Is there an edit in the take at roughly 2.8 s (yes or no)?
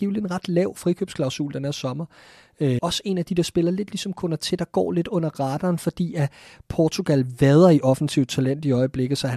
yes